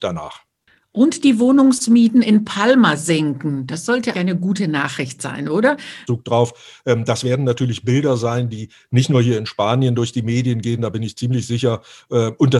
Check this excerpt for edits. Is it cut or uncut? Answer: cut